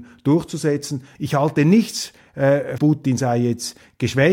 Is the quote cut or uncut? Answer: cut